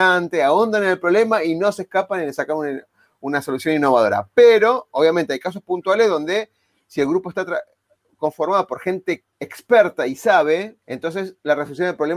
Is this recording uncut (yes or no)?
no